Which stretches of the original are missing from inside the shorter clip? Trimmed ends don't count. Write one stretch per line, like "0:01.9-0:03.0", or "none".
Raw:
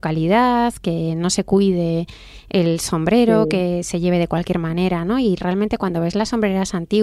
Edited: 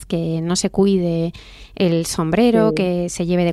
none